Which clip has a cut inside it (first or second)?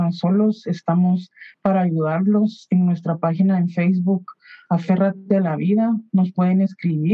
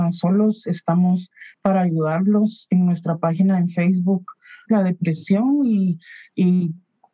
second